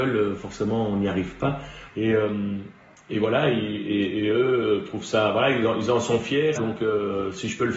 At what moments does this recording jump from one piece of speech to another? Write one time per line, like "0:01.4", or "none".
0:01.9
0:06.6

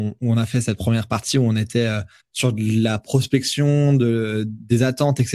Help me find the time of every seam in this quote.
0:02.2

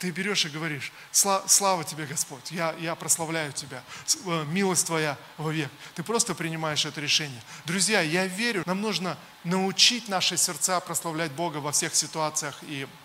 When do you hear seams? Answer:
0:07.6
0:08.6

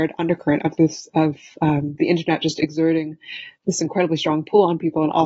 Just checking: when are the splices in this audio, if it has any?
none

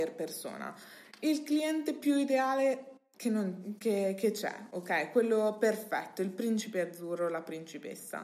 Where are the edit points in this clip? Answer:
none

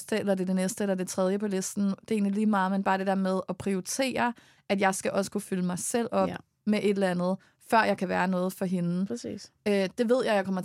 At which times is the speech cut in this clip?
none

